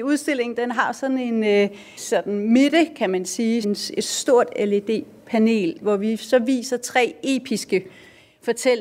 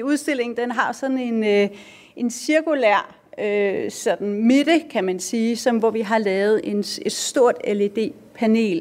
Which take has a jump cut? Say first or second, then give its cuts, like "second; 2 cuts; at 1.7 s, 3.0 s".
first; 3 cuts; at 2.0 s, 3.6 s, 5.8 s